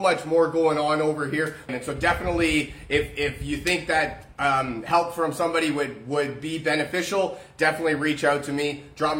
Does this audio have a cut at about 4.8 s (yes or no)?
no